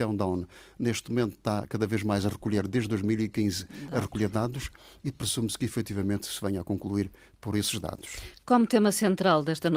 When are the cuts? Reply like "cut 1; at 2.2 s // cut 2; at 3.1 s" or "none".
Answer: none